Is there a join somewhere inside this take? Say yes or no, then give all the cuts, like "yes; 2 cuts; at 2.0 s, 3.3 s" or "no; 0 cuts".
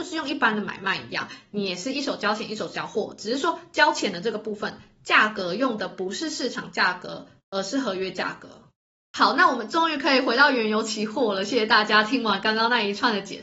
no; 0 cuts